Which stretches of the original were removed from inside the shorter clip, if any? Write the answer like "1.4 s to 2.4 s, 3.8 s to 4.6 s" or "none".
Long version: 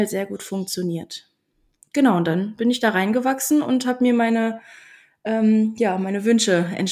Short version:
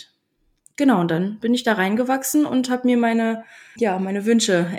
4.9 s to 5.8 s